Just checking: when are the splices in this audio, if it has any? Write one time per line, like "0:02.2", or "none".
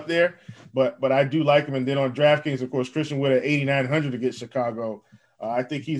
none